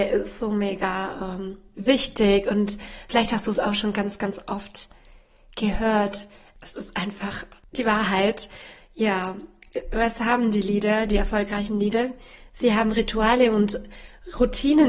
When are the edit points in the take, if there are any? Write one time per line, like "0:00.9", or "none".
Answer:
none